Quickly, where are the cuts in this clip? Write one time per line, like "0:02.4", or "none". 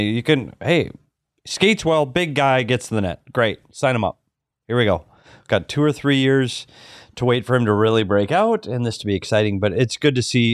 none